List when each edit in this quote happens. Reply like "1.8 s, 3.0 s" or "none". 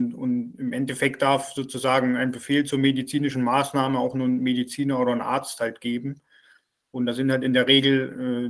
none